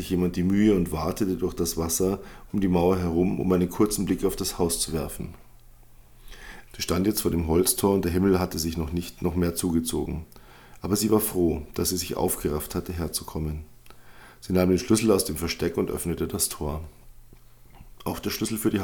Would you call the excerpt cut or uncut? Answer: cut